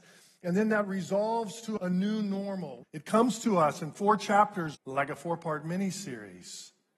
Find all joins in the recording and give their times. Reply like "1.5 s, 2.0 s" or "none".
1.8 s, 2.8 s, 4.7 s